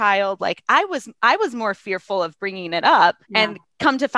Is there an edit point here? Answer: yes; 1 cut; at 3.2 s

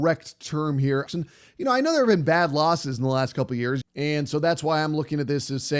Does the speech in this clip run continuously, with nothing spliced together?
no; 2 cuts; at 1.1 s, 3.8 s

